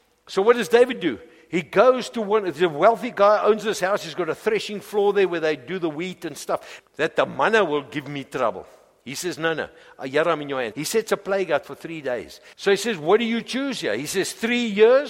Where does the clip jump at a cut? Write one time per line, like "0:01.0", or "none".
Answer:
0:06.8
0:10.7
0:12.5